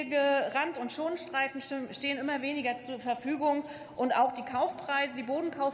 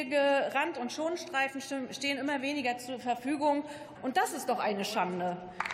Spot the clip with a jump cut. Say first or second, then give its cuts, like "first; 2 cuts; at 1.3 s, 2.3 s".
second; 1 cut; at 4.0 s